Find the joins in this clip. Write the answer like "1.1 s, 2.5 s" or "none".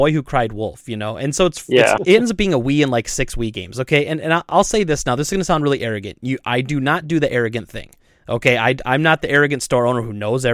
2.0 s